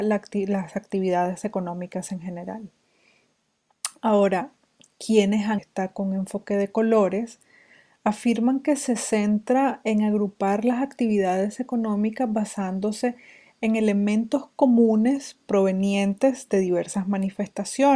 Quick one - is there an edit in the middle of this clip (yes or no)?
yes